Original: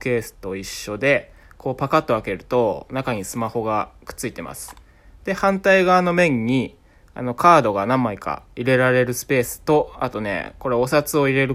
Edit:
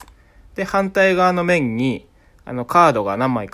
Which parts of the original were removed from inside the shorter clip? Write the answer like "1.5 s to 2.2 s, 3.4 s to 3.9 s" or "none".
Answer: none